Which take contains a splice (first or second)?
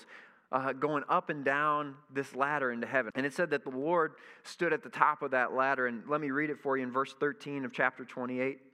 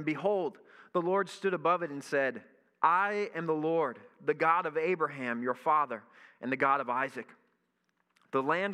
first